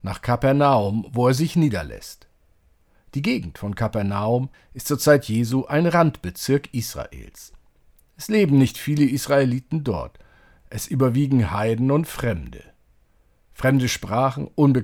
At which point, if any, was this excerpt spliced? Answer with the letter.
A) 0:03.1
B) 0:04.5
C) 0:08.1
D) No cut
B